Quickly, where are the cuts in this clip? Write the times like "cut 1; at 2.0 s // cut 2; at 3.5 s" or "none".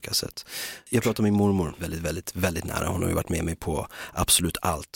cut 1; at 1.8 s

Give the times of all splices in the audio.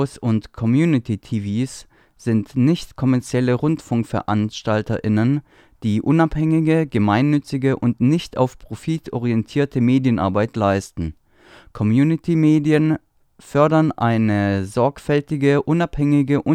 none

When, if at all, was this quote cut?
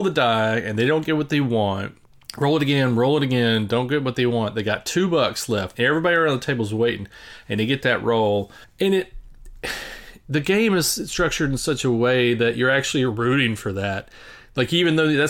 cut 1; at 5.7 s

